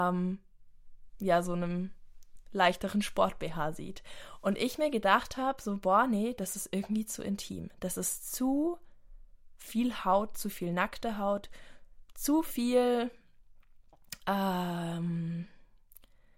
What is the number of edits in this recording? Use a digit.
0